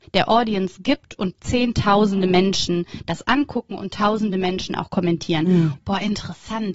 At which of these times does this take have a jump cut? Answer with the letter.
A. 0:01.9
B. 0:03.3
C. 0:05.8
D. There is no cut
C